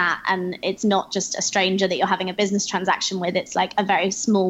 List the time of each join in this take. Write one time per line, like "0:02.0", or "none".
none